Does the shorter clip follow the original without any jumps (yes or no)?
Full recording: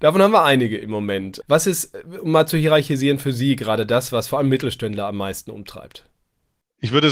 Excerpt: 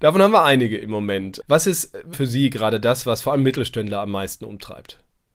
no